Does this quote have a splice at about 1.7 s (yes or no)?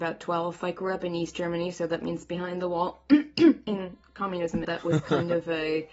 no